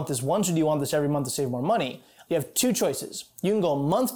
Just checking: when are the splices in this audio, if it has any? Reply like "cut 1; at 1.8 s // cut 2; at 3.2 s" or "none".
cut 1; at 2.3 s